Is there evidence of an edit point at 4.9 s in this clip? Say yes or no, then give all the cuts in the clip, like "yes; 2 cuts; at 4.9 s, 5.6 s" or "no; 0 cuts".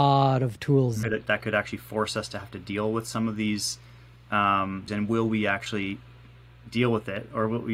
yes; 2 cuts; at 1.0 s, 4.9 s